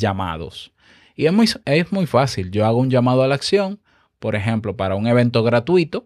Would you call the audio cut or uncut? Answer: uncut